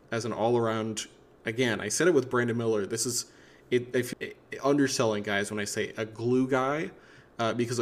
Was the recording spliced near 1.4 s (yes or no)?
no